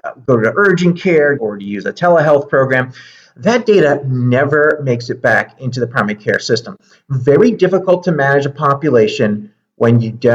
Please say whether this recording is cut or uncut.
cut